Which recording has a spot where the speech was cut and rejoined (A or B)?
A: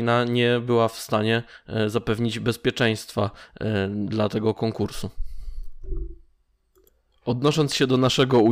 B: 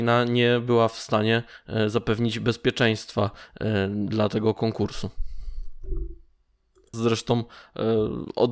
B